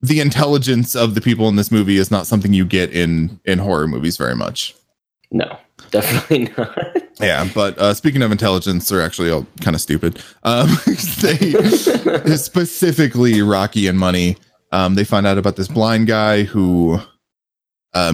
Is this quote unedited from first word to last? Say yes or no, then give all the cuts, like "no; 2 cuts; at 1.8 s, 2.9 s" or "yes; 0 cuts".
yes; 0 cuts